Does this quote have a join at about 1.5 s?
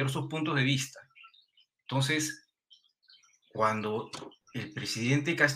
no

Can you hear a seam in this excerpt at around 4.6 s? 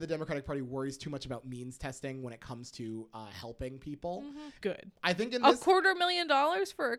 yes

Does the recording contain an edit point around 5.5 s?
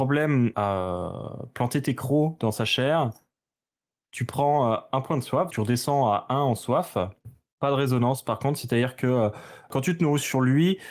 yes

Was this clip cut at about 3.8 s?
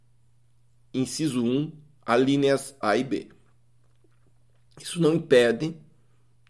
no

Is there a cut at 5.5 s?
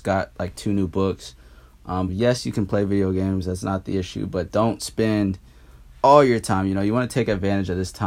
no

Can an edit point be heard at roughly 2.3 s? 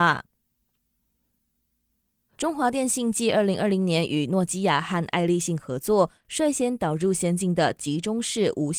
yes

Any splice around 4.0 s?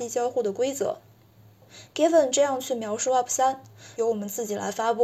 yes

